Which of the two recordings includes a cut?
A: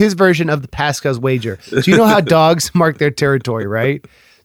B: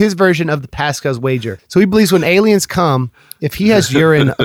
B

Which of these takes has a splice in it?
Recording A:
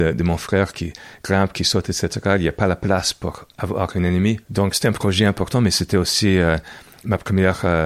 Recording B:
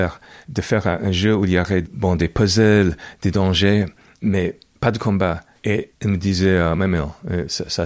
A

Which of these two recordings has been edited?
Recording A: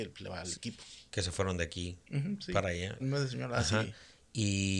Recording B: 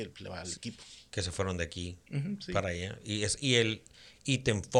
A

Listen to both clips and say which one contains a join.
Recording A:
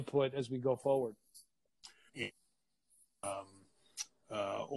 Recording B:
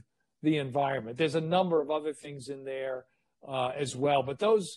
A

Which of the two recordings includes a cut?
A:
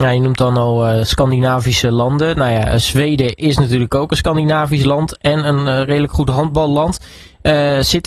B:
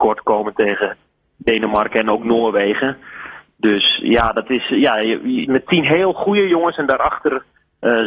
B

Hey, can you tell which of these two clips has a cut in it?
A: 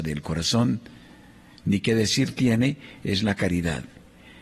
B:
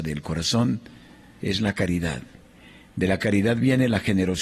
B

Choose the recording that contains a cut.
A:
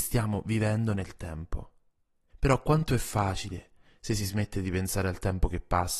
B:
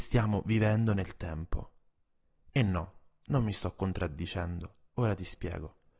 A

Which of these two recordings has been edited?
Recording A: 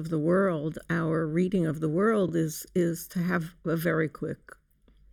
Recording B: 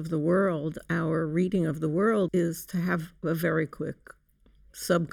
B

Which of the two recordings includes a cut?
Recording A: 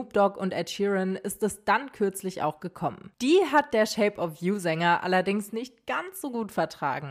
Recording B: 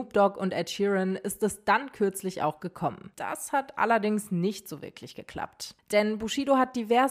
B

